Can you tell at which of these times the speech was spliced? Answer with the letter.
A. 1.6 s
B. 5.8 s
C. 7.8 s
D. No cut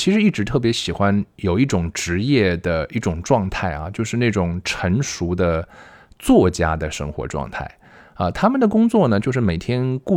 D